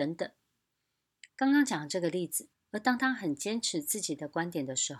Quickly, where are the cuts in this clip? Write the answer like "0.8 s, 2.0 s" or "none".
1.3 s, 2.5 s